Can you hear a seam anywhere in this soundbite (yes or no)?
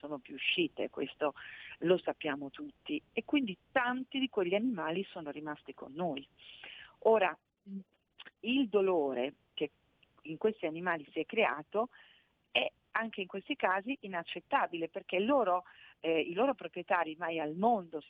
no